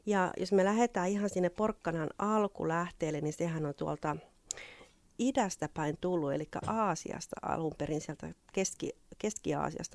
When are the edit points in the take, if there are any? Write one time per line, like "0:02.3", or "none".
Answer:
0:05.0

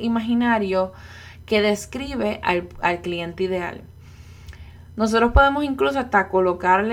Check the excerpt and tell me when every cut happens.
none

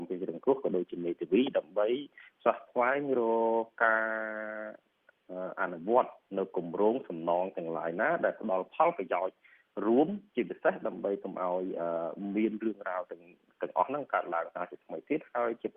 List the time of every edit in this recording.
0:10.3

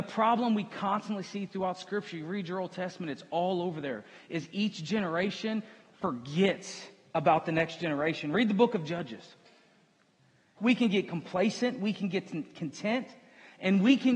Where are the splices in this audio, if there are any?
0:10.6

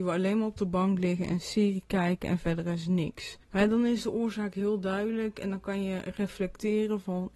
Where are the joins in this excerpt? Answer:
0:03.4

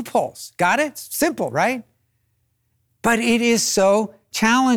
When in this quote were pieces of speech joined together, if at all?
none

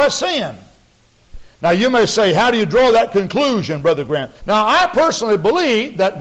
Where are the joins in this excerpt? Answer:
0:01.5
0:04.4

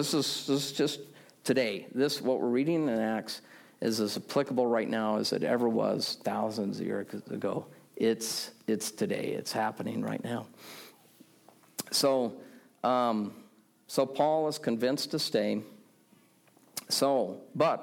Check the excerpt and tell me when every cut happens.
none

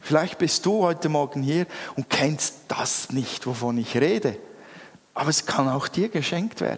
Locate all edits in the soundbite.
none

